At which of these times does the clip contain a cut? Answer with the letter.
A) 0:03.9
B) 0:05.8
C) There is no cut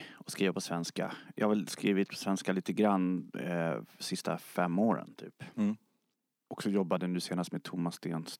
C